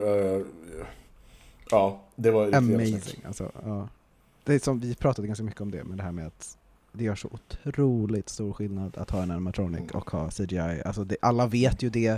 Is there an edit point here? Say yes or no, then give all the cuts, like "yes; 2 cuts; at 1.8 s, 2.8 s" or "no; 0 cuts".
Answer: no; 0 cuts